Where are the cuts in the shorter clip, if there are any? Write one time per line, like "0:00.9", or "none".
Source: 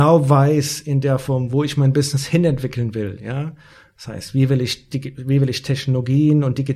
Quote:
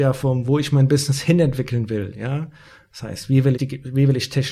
0:03.5